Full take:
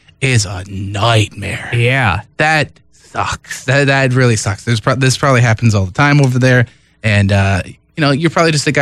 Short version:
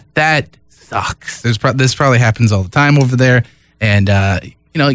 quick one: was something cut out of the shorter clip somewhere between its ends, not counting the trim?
yes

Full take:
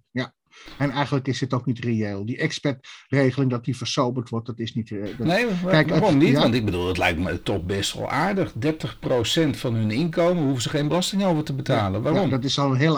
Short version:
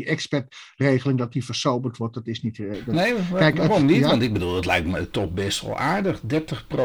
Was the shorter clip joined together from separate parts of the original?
no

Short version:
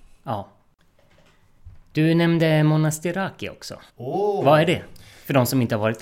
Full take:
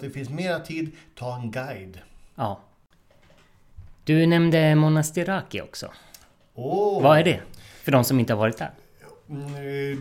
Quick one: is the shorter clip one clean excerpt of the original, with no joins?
no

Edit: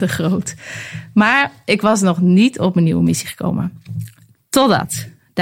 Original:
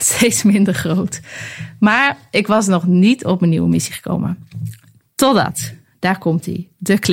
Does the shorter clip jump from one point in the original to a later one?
no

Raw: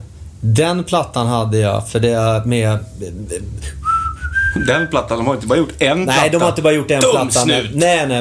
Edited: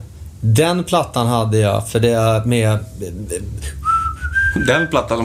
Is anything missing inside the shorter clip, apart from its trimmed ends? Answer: no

